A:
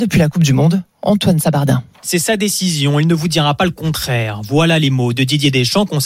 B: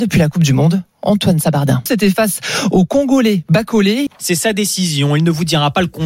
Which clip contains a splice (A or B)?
B